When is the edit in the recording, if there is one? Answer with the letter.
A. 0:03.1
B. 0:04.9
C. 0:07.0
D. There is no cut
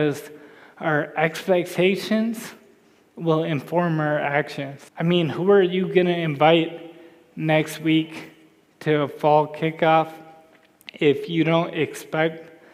B